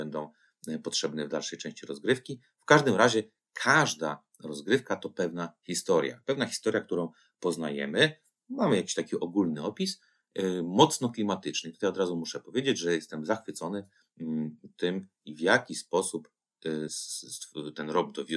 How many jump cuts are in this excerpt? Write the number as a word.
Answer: one